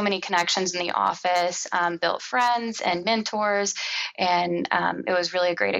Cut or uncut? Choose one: uncut